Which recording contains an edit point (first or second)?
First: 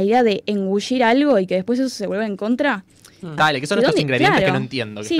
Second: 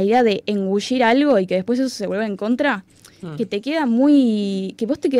first